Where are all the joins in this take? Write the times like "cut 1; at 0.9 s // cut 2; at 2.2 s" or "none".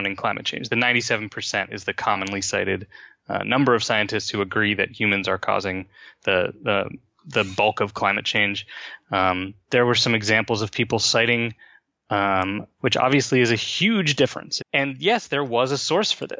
cut 1; at 12.8 s // cut 2; at 14.6 s